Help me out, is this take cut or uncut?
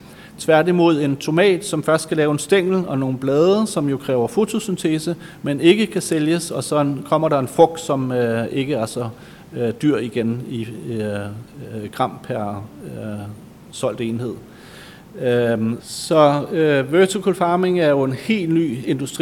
cut